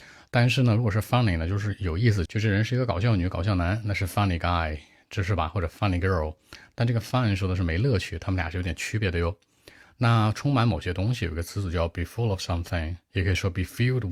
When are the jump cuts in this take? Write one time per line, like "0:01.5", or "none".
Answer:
0:02.3